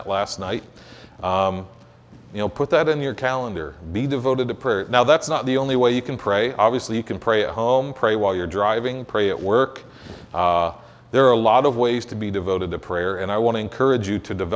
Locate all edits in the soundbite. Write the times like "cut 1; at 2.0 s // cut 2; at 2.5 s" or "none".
none